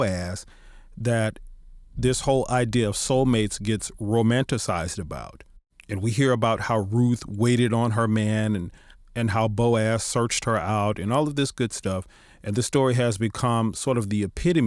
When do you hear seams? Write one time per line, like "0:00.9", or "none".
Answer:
none